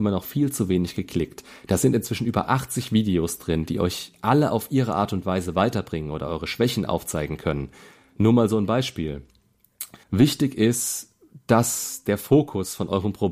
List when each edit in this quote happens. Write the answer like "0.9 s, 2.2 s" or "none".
10.0 s

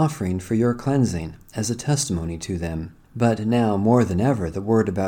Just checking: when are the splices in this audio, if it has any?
3.0 s

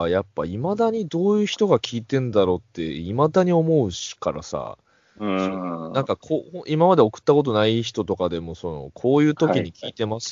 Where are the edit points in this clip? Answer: none

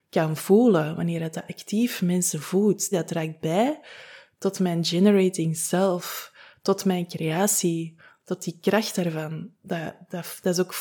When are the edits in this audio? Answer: 2.9 s

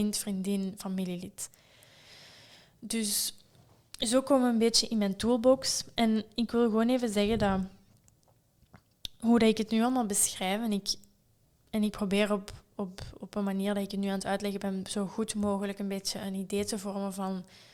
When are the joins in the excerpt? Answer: none

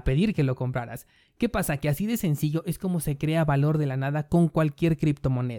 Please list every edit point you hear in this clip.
none

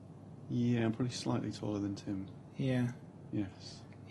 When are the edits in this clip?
none

